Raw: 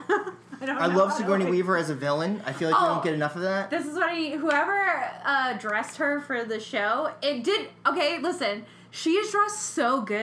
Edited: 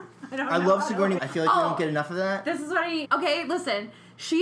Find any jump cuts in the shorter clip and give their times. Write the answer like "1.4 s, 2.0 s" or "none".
1.2 s, 3.0 s